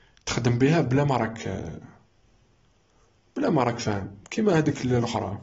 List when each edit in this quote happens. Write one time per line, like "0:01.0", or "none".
none